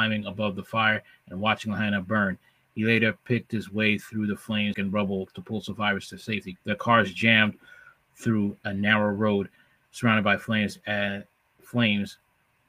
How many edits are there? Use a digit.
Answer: 2